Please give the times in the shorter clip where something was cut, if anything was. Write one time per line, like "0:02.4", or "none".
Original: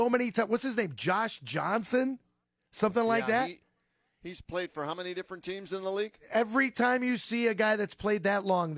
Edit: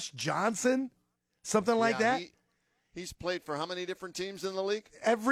none